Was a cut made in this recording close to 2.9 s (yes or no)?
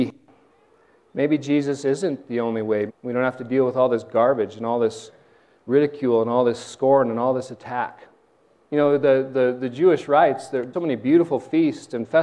yes